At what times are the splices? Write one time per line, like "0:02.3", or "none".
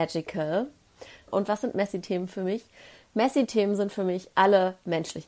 0:01.3